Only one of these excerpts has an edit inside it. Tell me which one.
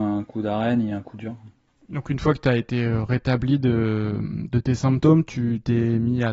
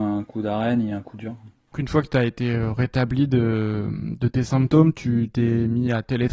second; 1 cut; at 1.7 s

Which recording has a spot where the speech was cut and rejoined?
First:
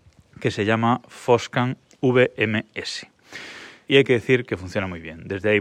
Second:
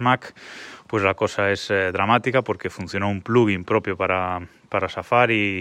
first; 1 cut; at 3.9 s

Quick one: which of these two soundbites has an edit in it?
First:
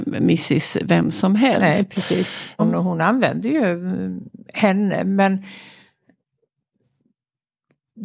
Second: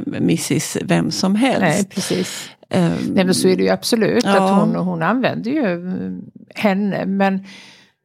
first; 1 cut; at 2.6 s

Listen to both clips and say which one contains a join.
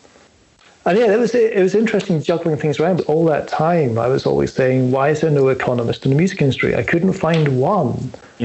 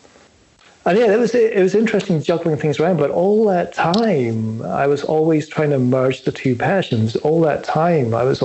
first; 1 cut; at 3.0 s

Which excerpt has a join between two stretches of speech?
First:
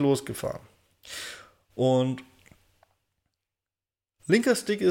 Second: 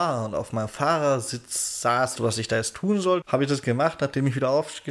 second; 2 cuts; at 2.2 s, 3.2 s

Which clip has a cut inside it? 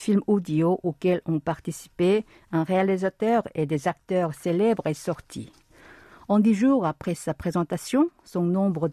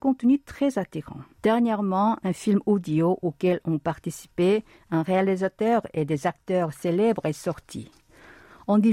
second; 1 cut; at 1.3 s

